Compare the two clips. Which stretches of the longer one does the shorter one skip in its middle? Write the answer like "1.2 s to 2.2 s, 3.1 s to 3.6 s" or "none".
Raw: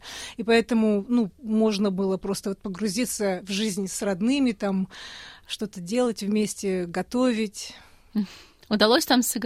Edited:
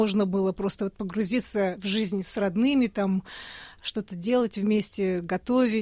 none